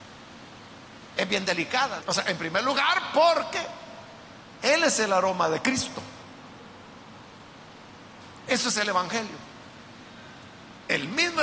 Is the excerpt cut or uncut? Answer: cut